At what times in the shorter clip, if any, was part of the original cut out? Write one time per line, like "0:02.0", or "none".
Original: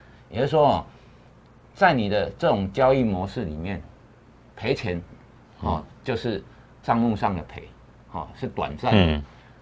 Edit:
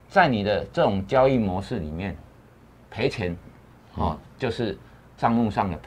none